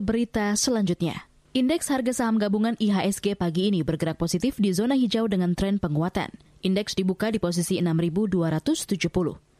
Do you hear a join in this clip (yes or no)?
no